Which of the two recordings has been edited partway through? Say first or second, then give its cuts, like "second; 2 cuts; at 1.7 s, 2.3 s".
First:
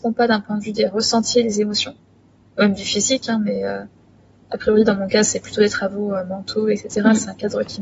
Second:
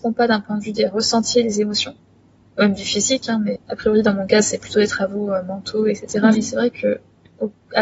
second; 2 cuts; at 3.6 s, 6.3 s